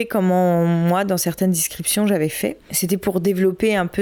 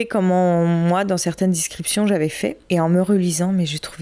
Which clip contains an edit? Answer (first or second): first